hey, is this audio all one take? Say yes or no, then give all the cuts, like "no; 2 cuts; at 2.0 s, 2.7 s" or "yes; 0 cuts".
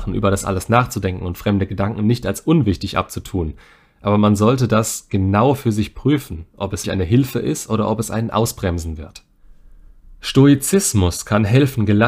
no; 1 cut; at 6.8 s